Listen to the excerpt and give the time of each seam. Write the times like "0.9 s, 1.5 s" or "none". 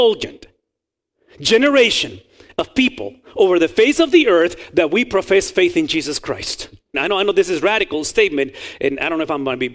6.9 s